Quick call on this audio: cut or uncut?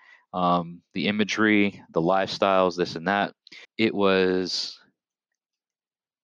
cut